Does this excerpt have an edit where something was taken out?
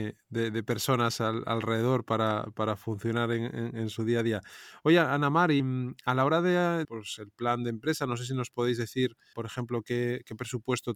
yes; 3 cuts; at 5.6 s, 6.8 s, 9.3 s

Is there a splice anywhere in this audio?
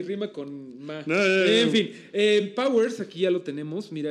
no; 0 cuts

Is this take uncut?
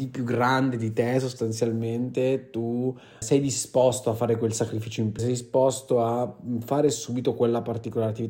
no; 2 cuts; at 3.2 s, 5.2 s

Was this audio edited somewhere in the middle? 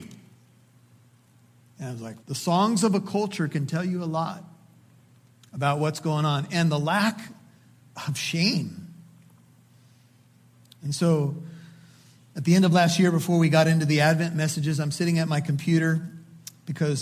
yes; 1 cut; at 2.2 s

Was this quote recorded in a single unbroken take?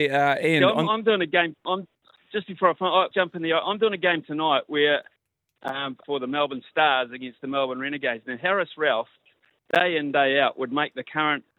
no; 2 cuts; at 3.1 s, 6.0 s

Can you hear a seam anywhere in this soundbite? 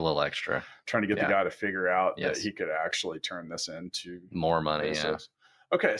no; 0 cuts

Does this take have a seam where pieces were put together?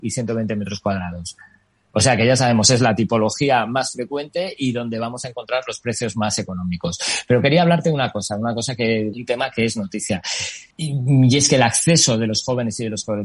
yes; 2 cuts; at 9.1 s, 10.7 s

